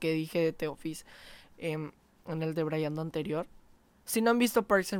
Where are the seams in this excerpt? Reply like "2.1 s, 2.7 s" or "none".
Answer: none